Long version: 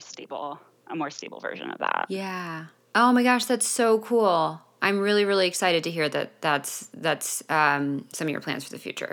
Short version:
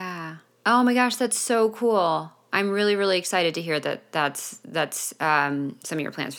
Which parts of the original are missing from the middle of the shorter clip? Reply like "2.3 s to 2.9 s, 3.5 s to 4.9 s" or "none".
none

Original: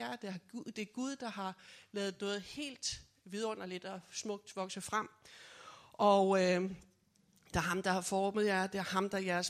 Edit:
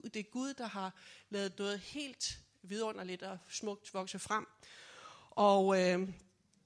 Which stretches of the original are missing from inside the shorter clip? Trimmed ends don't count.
none

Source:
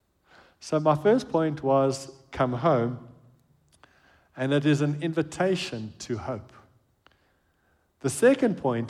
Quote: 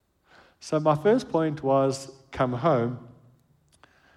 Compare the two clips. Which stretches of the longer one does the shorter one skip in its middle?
none

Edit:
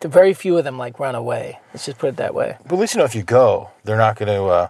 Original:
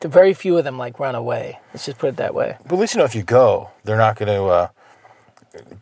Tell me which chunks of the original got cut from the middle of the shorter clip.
none

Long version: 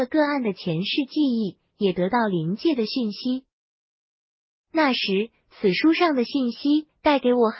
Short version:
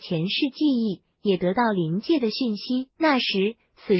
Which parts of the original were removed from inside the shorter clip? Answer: 3.5 s to 4.7 s

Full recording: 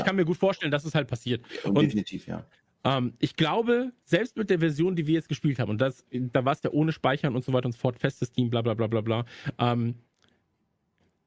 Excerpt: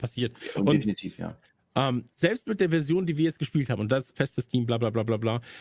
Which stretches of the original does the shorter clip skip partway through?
3.2 s to 4.0 s, 6.0 s to 8.0 s

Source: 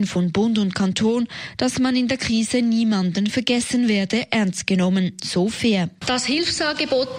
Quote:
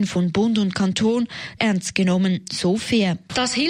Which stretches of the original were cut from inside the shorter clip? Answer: 1.6 s to 4.3 s

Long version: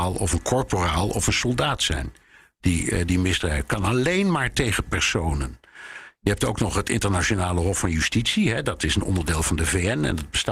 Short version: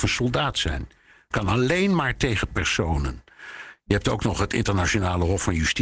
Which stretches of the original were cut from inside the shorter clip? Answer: 2.5 s to 3.7 s

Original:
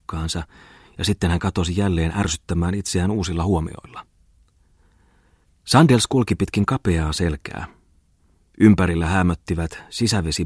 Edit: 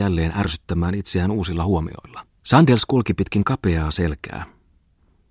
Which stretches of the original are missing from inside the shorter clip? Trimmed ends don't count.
4.2 s to 5.6 s

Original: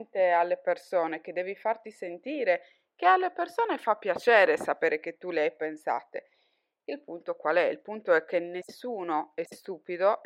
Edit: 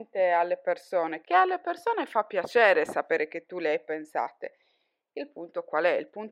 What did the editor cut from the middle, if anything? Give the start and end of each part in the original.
1.2 s to 2.9 s

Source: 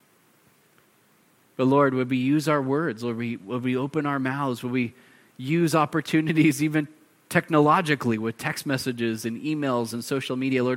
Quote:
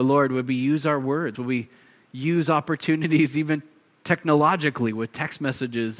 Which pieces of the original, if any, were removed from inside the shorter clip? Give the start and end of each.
3.0 s to 4.6 s

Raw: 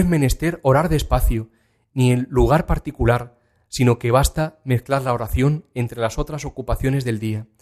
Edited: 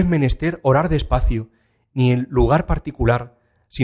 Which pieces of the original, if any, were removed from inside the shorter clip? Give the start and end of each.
none

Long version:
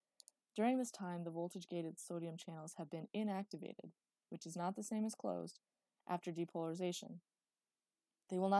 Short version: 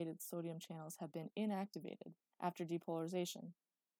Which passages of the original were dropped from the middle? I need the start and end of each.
4.1 s to 6.0 s

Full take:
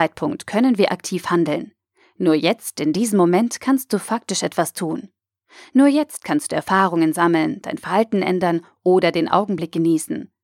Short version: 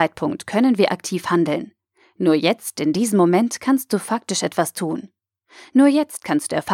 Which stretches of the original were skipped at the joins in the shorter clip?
none

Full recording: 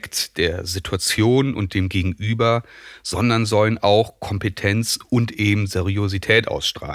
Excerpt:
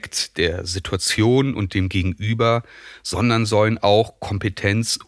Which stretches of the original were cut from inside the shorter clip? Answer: none

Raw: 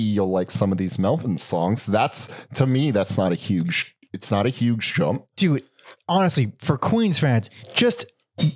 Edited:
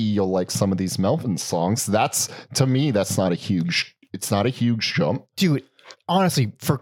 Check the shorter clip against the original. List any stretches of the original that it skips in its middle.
none

